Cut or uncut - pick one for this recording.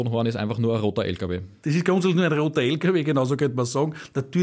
uncut